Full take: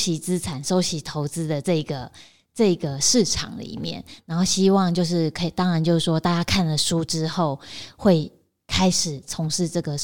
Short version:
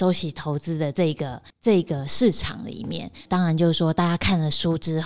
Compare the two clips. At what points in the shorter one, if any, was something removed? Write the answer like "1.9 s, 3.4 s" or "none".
1.5 s, 3.3 s